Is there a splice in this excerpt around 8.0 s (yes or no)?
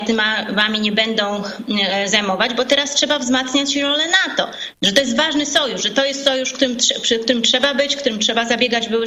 no